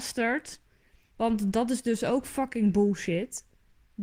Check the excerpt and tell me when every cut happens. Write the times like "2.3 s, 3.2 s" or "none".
1.1 s